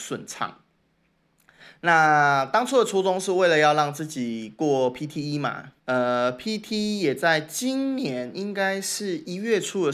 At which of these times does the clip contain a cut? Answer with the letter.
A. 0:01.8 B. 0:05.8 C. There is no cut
B